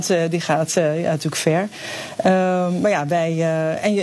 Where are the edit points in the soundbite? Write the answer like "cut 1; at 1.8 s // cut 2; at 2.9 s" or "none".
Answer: none